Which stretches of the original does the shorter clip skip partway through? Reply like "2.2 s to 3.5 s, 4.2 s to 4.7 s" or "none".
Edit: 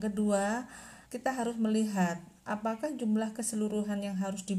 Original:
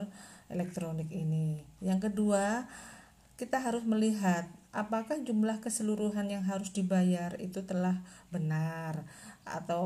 3.0 s to 3.3 s